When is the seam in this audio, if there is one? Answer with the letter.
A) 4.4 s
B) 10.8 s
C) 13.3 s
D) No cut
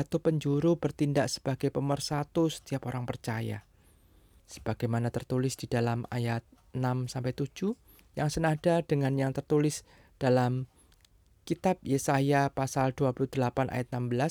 A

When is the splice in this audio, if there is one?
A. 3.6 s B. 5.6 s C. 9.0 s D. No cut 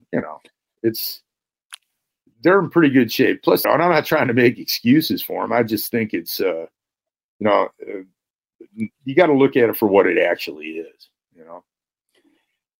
A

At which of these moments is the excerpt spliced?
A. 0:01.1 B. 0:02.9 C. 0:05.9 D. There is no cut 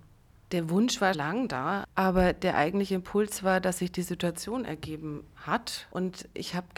A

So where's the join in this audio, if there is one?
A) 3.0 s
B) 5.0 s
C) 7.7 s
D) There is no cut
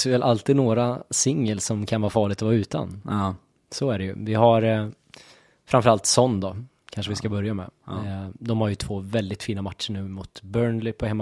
D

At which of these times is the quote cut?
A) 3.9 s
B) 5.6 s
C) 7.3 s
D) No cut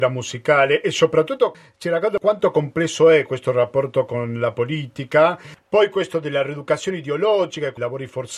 B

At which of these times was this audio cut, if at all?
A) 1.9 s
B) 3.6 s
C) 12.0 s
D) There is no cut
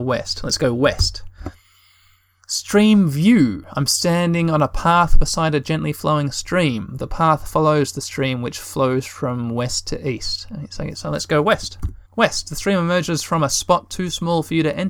C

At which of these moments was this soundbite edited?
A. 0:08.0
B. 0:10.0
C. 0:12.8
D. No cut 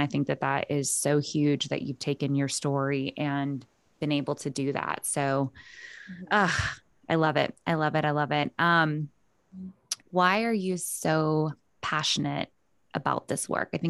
B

